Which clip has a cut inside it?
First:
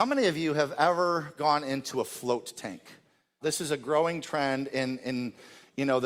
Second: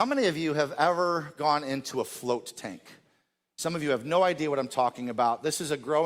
first; 1 cut; at 3.4 s

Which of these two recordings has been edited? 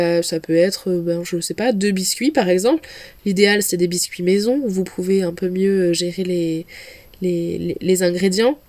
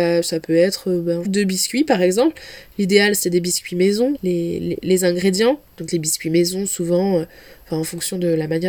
second; 2 cuts; at 1.2 s, 4.1 s

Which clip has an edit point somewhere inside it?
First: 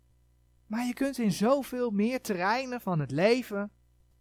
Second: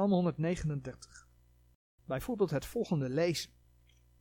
second; 1 cut; at 2.0 s

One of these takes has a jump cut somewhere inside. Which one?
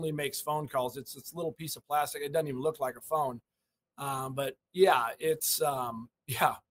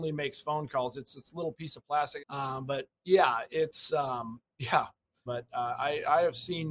second; 2 cuts; at 2.2 s, 5.3 s

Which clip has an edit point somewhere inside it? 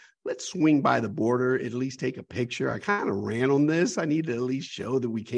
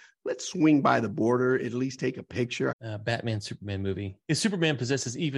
second; 2 cuts; at 2.7 s, 4.2 s

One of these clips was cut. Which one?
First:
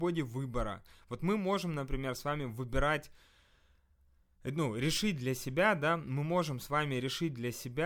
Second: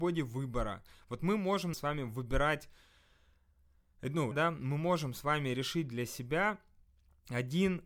second; 2 cuts; at 1.7 s, 4.3 s

